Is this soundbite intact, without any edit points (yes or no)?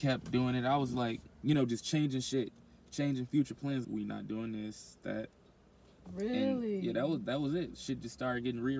no